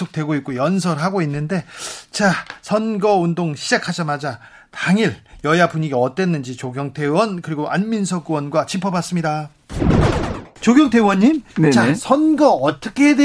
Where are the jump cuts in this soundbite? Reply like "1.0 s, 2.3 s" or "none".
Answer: none

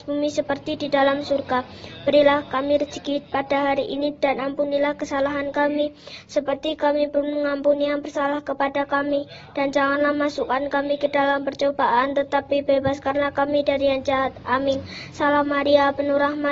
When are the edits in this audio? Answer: none

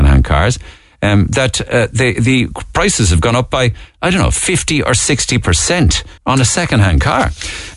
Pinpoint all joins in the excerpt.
6.2 s

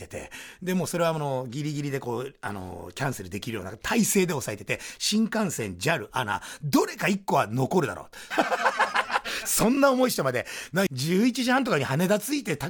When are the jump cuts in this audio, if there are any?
8.3 s, 10.9 s

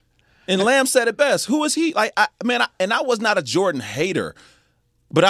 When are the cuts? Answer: none

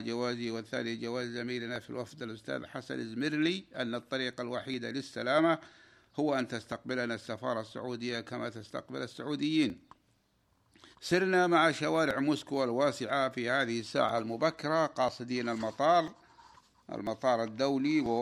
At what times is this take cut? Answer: 10.9 s

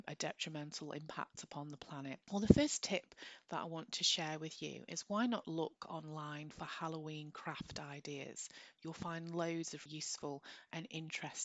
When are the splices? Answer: 2.3 s, 9.9 s

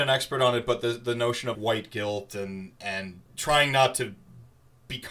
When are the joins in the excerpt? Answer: 1.5 s, 3.3 s

